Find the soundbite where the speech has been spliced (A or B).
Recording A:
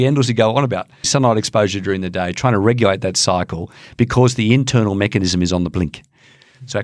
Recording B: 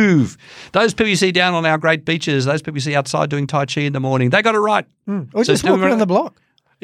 A